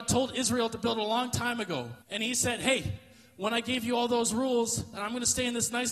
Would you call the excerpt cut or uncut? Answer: cut